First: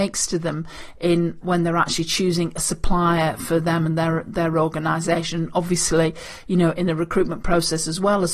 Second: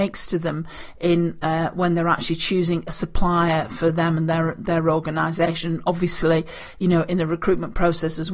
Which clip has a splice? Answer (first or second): first